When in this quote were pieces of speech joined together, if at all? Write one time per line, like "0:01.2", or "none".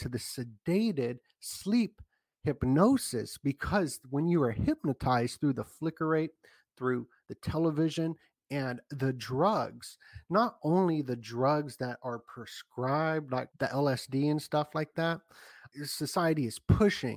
0:13.5
0:15.7